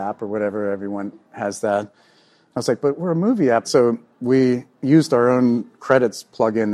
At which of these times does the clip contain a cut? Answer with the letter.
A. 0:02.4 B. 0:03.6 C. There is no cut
B